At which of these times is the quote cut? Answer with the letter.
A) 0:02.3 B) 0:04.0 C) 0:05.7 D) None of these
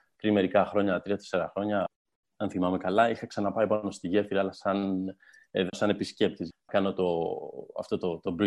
C